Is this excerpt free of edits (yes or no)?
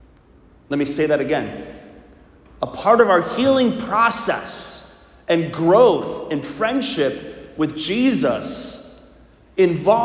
yes